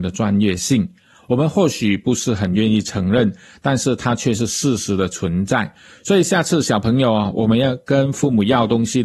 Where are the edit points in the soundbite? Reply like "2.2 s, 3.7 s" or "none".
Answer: none